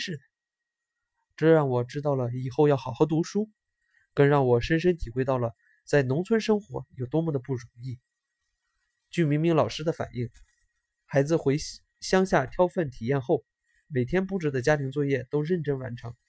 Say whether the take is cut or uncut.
uncut